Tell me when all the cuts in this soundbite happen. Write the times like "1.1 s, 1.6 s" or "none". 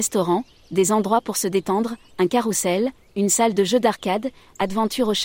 2.1 s